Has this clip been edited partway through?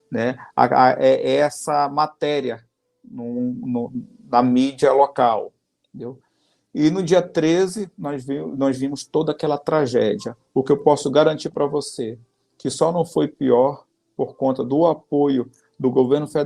no; 0 cuts

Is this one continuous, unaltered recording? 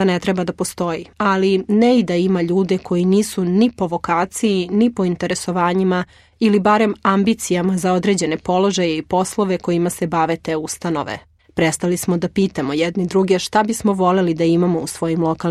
no; 2 cuts; at 1.1 s, 11.4 s

